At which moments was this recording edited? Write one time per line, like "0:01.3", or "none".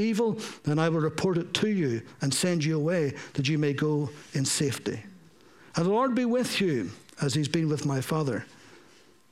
none